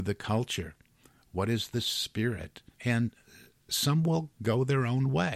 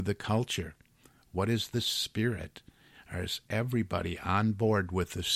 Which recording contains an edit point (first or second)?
first